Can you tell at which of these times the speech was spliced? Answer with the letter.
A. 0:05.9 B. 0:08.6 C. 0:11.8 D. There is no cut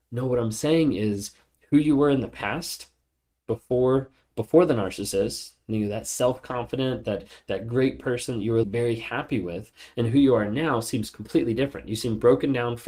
B